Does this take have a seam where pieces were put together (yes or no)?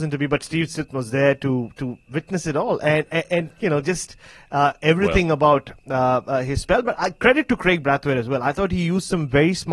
no